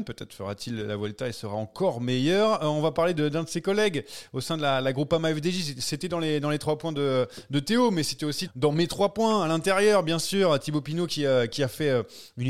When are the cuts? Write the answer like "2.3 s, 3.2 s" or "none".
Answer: 8.5 s